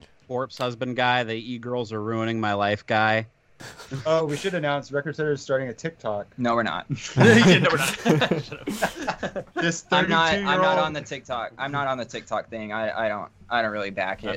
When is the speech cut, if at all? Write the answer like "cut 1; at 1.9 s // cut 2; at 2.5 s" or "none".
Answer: cut 1; at 9.5 s